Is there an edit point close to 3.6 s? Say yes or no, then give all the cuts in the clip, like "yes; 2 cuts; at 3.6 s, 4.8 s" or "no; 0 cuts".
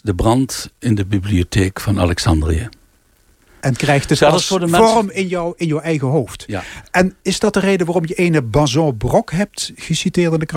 yes; 1 cut; at 3.6 s